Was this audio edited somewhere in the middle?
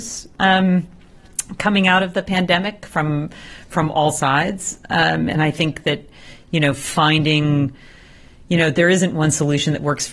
no; 0 cuts

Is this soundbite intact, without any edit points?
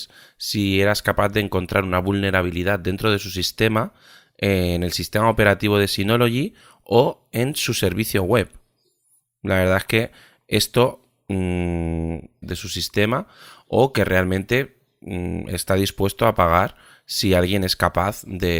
no; 1 cut; at 12.4 s

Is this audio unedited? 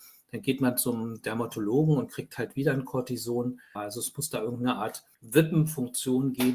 no; 2 cuts; at 3.8 s, 5.1 s

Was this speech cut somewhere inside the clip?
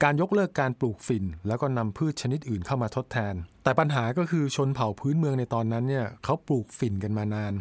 yes; 1 cut; at 3.5 s

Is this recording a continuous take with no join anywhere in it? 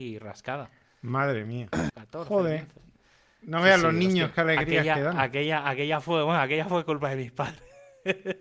no; 1 cut; at 1.9 s

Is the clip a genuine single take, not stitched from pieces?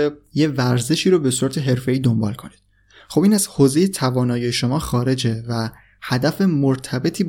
yes; 0 cuts

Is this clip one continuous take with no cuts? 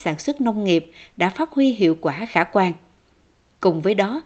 yes; 0 cuts

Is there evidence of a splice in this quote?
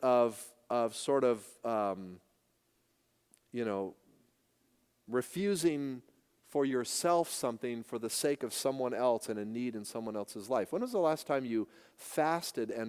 no; 0 cuts

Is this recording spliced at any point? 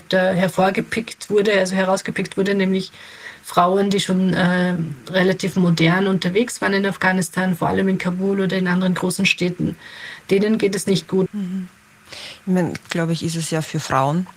yes; 2 cuts; at 11.3 s, 12.8 s

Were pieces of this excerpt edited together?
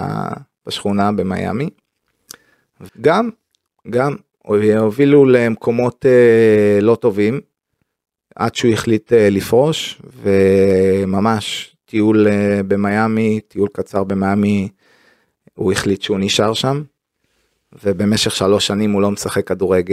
yes; 1 cut; at 2.9 s

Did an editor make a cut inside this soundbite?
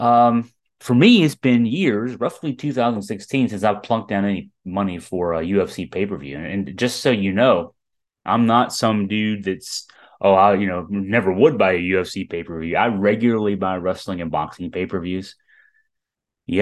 no; 0 cuts

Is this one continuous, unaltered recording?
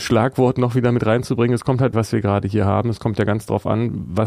no; 1 cut; at 1.9 s

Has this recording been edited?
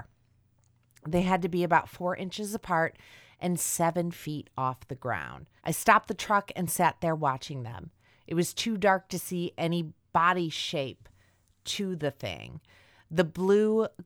yes; 1 cut; at 5.6 s

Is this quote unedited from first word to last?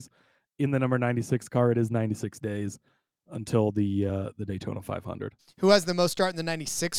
yes; 0 cuts

